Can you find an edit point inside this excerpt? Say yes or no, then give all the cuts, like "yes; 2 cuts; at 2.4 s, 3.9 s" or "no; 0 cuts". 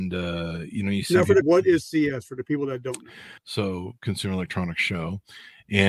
yes; 2 cuts; at 1.4 s, 3.4 s